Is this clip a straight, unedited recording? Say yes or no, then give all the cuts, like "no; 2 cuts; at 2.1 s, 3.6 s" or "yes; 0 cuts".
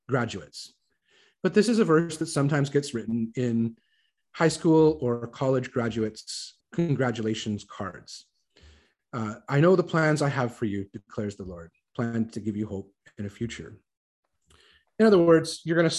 no; 1 cut; at 6.6 s